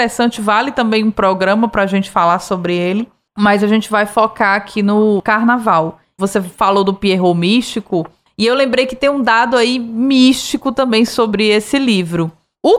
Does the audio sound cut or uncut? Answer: cut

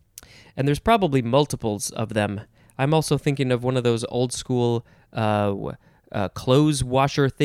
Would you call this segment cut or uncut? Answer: uncut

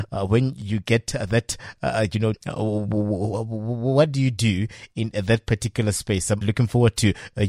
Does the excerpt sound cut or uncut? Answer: cut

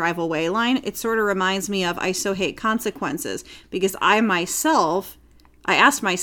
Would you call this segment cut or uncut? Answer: uncut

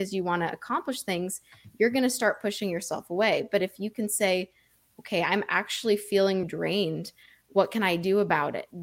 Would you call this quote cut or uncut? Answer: cut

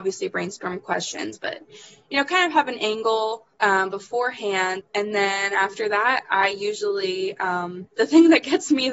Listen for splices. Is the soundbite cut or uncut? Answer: cut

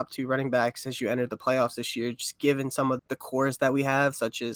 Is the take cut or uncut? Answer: cut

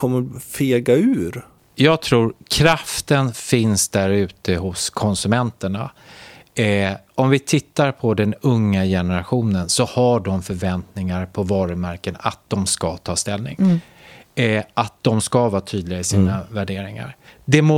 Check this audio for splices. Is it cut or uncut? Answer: uncut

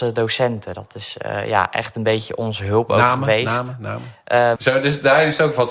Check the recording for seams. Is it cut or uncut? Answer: cut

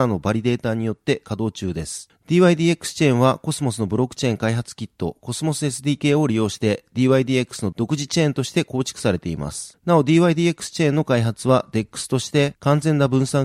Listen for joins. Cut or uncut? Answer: cut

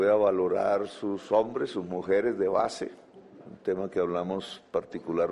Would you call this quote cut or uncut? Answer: uncut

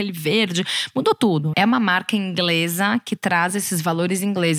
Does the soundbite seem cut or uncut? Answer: cut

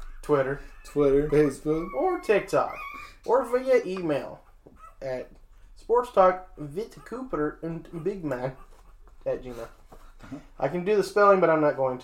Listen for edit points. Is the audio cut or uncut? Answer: cut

